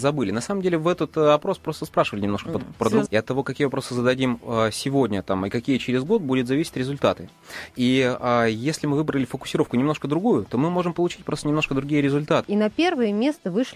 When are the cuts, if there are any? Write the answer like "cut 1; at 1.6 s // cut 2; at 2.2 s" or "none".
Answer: cut 1; at 3.1 s // cut 2; at 12.4 s